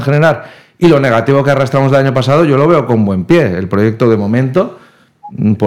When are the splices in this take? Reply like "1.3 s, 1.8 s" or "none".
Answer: none

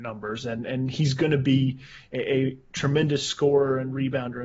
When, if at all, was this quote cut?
none

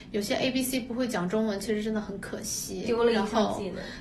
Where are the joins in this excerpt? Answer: none

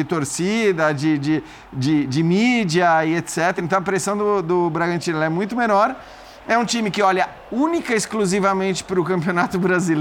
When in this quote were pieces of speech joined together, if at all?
none

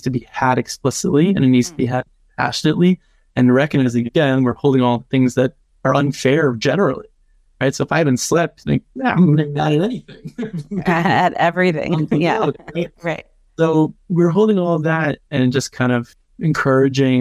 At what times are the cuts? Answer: none

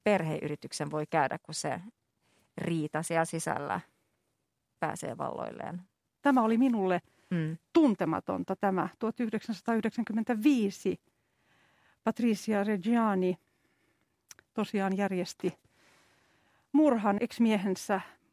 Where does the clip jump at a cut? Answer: 6.2 s, 17.2 s

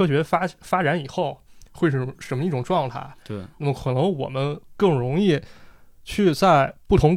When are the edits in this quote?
none

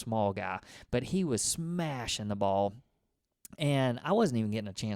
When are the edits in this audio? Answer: none

